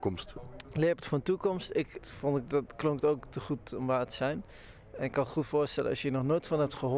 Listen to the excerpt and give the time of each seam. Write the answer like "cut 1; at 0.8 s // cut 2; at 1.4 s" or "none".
cut 1; at 2.0 s